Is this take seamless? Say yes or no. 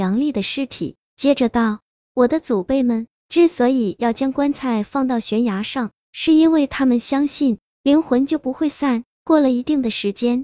no